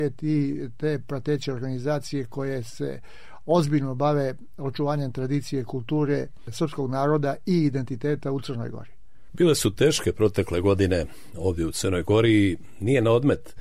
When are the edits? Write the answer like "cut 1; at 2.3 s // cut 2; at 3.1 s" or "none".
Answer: none